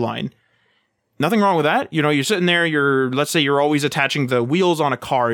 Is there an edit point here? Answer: no; 0 cuts

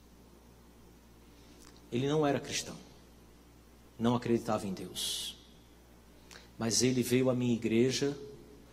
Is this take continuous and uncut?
yes; 0 cuts

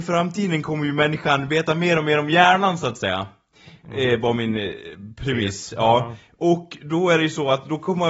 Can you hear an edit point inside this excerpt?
no; 0 cuts

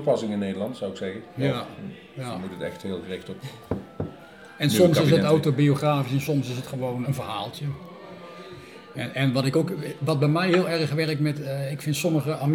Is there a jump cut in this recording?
yes; 1 cut; at 7.0 s

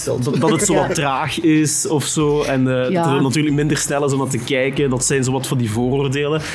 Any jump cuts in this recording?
no; 0 cuts

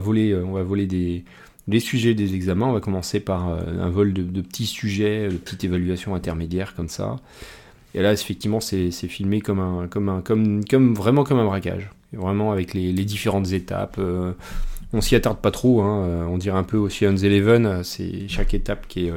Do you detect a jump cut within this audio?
no; 0 cuts

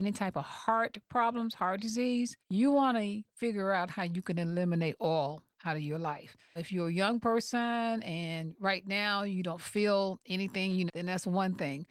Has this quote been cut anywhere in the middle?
yes; 3 cuts; at 2.4 s, 6.6 s, 10.9 s

